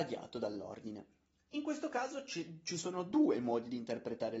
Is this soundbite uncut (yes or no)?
yes